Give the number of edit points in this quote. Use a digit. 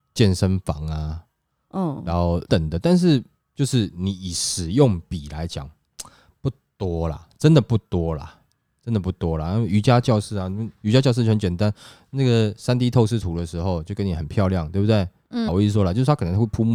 2